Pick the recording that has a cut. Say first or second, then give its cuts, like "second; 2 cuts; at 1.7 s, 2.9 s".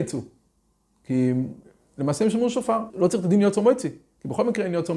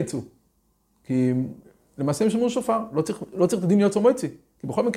first; 1 cut; at 2.9 s